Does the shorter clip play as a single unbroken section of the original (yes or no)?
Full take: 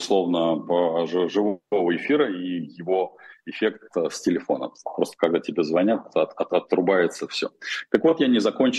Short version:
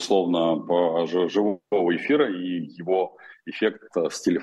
yes